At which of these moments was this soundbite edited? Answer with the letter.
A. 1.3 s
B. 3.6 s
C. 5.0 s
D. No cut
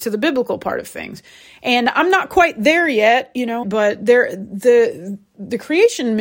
B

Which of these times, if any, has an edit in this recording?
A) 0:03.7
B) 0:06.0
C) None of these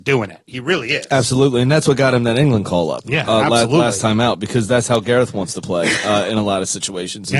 C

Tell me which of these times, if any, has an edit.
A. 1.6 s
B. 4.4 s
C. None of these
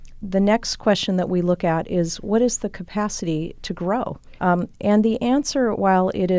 B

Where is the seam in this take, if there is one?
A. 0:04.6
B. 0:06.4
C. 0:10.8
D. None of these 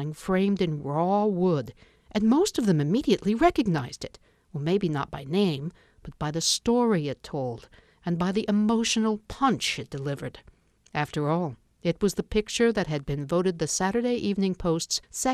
D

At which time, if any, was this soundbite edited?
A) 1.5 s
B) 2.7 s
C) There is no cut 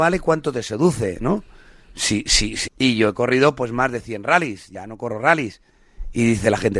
B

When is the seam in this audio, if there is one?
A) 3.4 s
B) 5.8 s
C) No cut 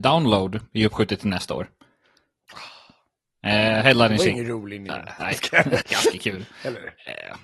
B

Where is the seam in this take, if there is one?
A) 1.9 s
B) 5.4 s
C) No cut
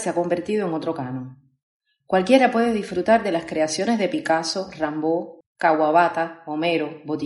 B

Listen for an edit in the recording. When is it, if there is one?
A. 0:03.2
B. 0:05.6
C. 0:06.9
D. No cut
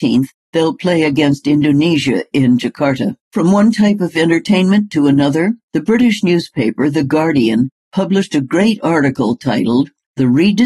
A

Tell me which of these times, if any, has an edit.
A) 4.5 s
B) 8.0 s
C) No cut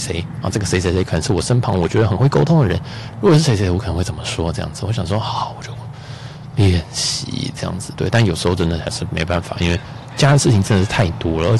C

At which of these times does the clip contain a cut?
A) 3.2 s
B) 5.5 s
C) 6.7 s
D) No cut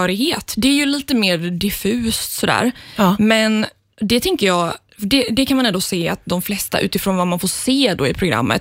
D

